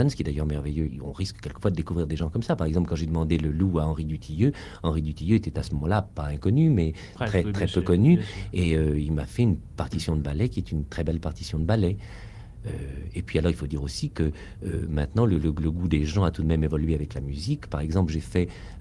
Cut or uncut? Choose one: uncut